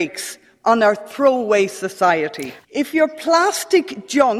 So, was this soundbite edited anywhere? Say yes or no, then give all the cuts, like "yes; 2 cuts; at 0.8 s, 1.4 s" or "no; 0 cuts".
yes; 1 cut; at 2.6 s